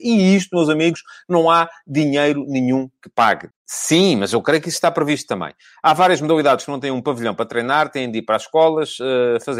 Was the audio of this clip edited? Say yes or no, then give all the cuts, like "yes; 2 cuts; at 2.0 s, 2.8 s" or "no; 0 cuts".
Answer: yes; 1 cut; at 3.5 s